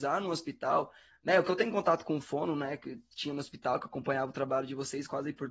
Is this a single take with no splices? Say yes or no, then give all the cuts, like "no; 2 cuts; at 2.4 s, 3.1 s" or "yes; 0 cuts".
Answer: yes; 0 cuts